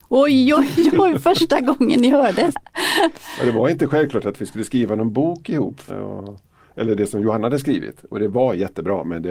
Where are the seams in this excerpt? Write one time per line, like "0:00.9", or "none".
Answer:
0:02.5
0:05.9